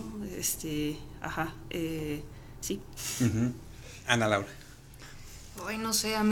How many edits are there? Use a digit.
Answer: 0